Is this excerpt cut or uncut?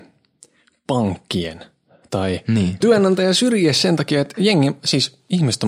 cut